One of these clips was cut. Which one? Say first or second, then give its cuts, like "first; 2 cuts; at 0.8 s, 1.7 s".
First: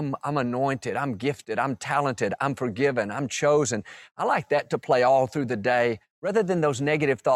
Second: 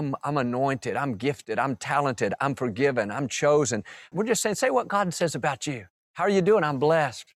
second; 1 cut; at 4.1 s